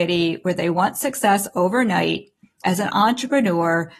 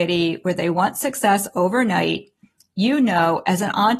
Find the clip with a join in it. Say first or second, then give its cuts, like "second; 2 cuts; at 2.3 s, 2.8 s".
first; 1 cut; at 2.6 s